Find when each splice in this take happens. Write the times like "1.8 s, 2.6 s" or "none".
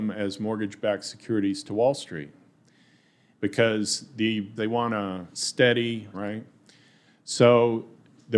3.3 s, 4.6 s, 6.1 s